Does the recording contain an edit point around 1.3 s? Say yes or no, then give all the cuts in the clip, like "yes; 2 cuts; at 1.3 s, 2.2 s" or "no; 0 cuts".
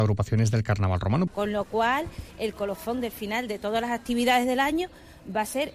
yes; 1 cut; at 1.3 s